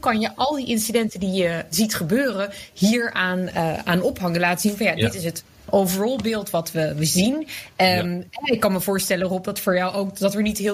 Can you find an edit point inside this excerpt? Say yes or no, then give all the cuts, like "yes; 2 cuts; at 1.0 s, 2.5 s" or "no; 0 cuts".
yes; 1 cut; at 1.7 s